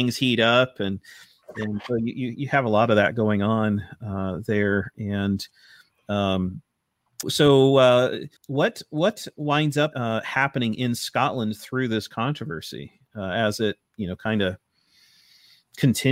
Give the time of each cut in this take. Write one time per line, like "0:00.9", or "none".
0:07.2
0:08.4
0:09.9